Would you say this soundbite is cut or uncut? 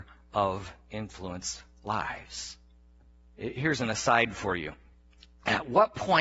cut